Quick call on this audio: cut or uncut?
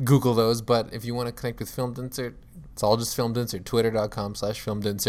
cut